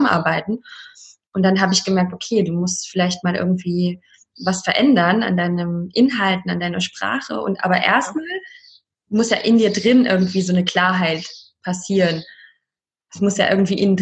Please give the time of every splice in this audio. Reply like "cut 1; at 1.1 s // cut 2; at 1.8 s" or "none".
none

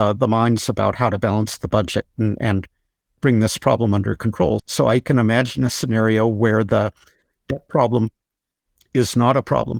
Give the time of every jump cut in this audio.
cut 1; at 4.6 s

